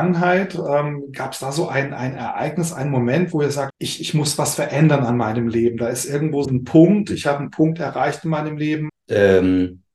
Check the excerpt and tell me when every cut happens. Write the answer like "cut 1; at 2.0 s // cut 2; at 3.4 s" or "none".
cut 1; at 3.7 s // cut 2; at 6.4 s // cut 3; at 8.9 s